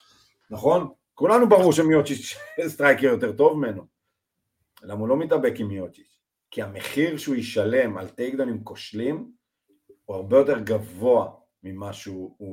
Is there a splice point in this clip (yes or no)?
no